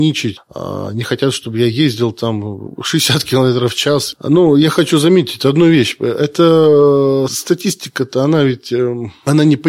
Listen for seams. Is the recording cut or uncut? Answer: uncut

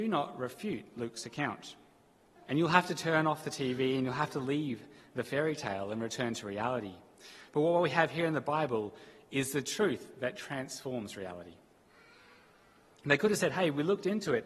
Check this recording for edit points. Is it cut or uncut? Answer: cut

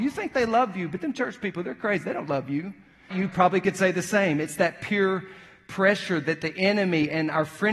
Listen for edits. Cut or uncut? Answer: cut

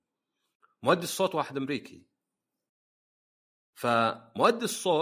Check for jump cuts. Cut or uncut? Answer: uncut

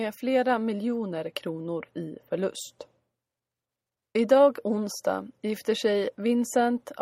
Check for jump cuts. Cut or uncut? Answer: cut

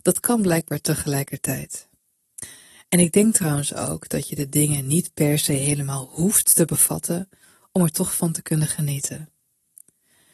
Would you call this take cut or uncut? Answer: uncut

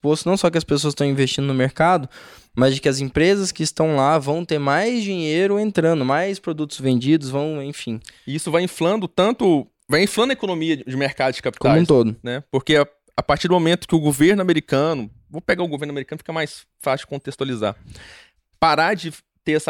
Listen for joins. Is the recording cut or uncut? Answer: uncut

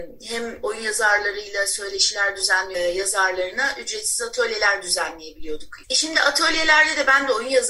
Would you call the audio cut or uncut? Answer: cut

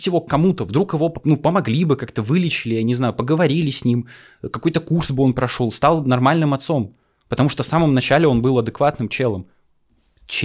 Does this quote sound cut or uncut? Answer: uncut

